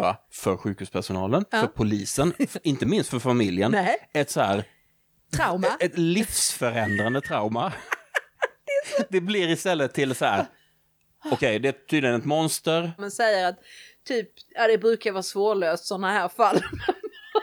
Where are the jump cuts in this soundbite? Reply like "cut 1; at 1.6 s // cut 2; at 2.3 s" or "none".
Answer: cut 1; at 13.0 s